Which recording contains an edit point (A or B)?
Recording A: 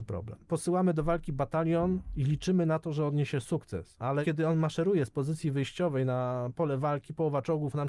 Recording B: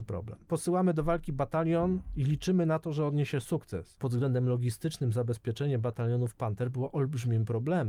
B